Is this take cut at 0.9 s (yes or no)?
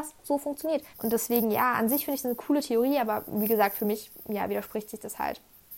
yes